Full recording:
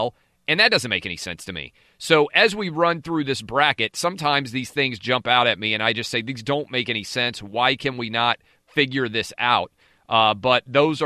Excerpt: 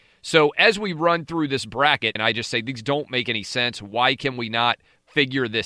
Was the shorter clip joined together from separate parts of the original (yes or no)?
yes